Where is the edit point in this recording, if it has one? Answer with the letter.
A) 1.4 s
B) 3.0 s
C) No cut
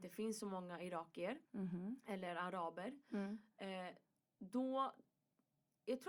A